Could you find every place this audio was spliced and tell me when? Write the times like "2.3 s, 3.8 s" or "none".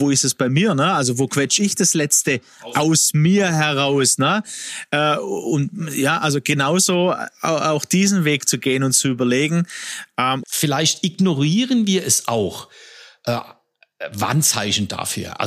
10.4 s

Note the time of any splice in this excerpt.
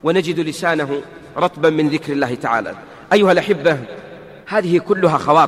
4.4 s

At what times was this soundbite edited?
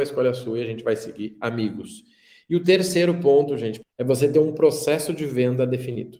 3.8 s

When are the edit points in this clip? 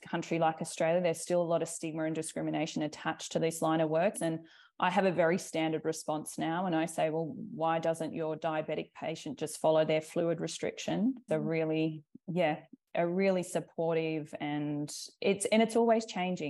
4.1 s, 11.3 s

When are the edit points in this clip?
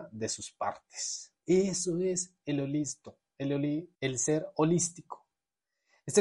1.4 s, 3.9 s

